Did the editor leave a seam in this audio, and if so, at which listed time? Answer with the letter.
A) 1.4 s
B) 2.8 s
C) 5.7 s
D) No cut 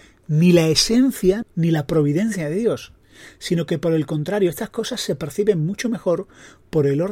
A